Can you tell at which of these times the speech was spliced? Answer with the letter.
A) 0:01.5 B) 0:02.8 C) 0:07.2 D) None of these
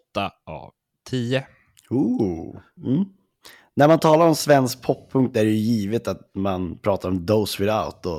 B